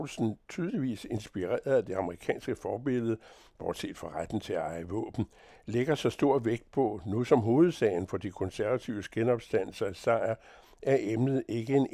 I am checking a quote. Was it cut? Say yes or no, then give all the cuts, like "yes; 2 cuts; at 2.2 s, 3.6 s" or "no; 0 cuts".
no; 0 cuts